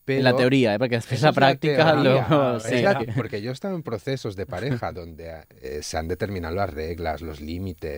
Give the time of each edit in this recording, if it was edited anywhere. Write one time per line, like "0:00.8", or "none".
0:03.0